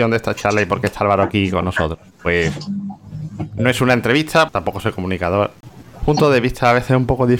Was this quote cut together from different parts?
yes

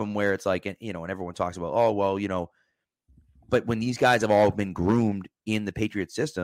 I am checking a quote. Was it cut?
no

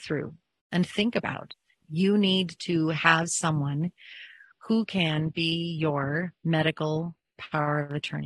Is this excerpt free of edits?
no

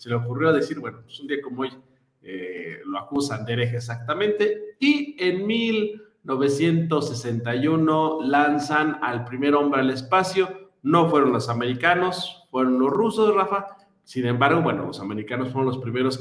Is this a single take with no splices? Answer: yes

